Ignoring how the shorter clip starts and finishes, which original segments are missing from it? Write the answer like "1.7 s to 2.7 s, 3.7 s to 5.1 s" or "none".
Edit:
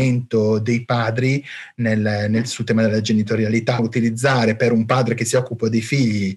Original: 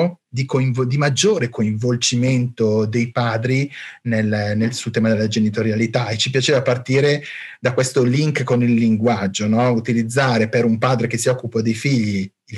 6.1 s to 9.7 s